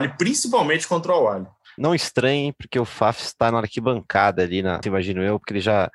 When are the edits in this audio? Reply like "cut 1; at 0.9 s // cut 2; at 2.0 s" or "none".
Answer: cut 1; at 1.8 s // cut 2; at 4.8 s